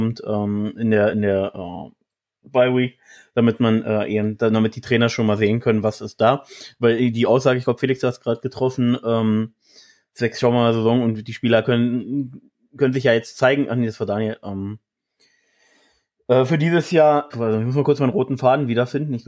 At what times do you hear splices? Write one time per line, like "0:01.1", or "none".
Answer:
0:17.3